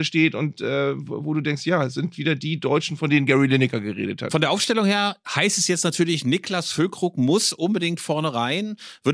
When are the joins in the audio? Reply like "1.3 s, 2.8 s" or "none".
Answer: 5.2 s